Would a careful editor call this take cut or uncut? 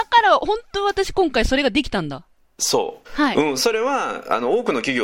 cut